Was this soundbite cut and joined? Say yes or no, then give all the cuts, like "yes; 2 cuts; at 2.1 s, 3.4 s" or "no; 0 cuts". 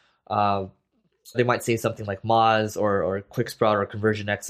yes; 1 cut; at 1.3 s